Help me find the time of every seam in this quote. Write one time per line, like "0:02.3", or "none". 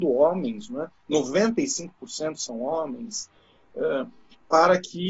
none